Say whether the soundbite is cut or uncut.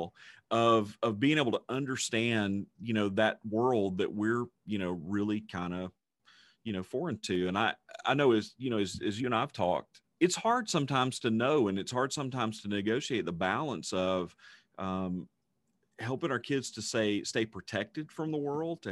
cut